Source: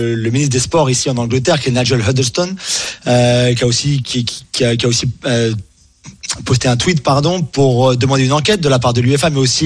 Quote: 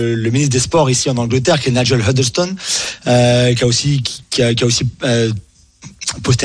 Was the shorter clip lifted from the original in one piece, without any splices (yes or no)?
no